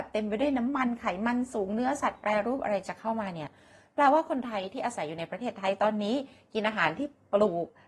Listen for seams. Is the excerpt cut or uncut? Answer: uncut